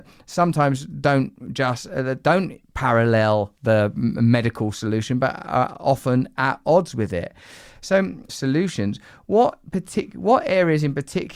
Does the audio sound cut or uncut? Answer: cut